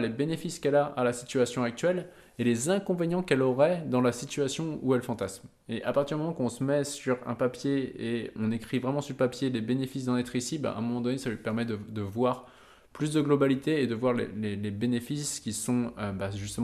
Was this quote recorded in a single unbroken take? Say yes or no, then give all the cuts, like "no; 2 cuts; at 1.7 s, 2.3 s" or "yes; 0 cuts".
no; 1 cut; at 8.4 s